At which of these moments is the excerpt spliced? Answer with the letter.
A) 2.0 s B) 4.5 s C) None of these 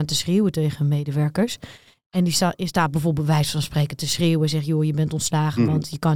C